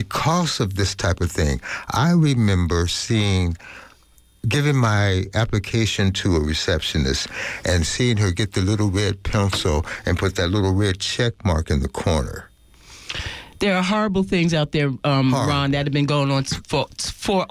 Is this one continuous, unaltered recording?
yes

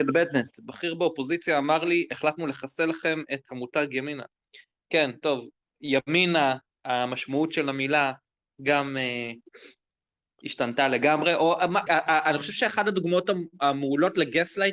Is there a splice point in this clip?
yes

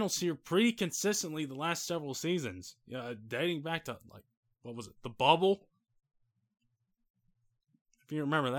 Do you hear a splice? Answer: no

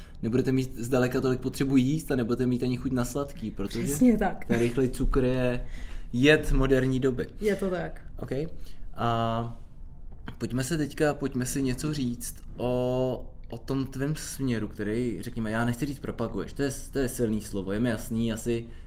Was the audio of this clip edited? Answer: no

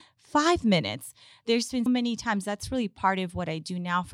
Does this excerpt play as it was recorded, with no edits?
no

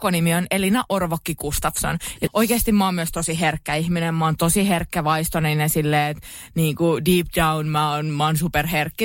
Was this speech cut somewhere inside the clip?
yes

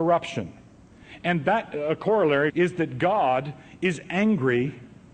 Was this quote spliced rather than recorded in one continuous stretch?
yes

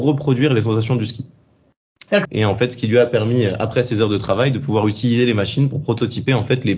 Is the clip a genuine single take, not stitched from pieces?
no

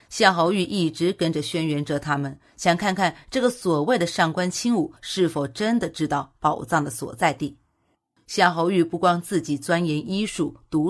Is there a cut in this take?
yes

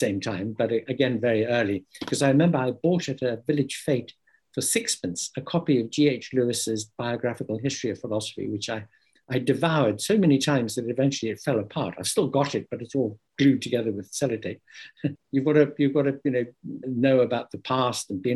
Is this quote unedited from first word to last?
no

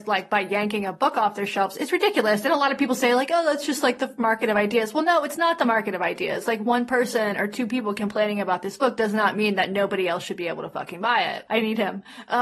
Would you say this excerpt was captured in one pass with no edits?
no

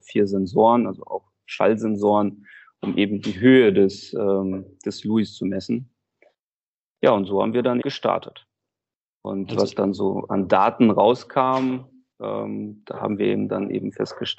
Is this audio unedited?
no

